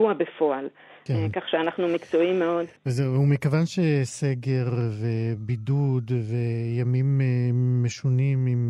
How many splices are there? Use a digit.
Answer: 2